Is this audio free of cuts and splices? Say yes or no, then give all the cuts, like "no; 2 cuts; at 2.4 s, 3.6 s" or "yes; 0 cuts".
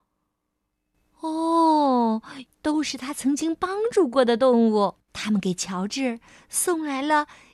no; 2 cuts; at 2.5 s, 5.0 s